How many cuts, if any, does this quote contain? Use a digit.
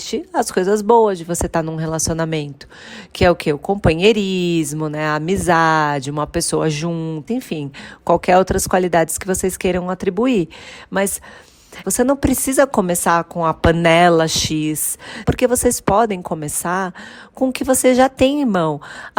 3